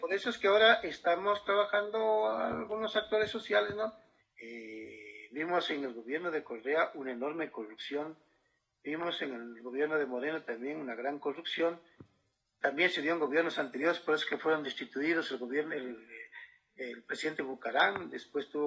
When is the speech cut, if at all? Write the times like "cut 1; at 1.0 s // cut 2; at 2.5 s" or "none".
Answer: cut 1; at 4.2 s

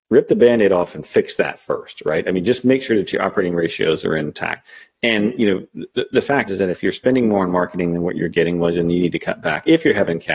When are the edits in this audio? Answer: cut 1; at 6.5 s

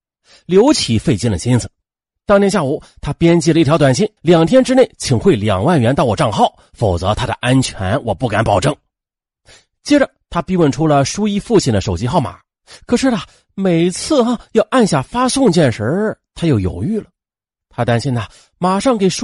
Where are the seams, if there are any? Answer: cut 1; at 4.2 s

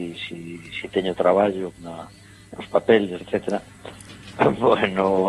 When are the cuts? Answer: cut 1; at 1.8 s // cut 2; at 3.2 s // cut 3; at 4.3 s

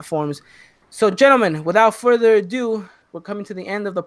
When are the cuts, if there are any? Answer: none

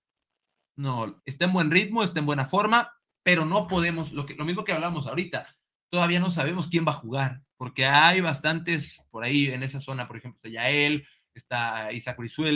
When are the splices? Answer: cut 1; at 1.2 s

